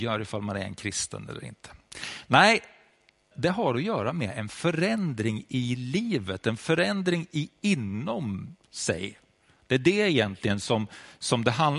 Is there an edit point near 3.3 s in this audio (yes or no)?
yes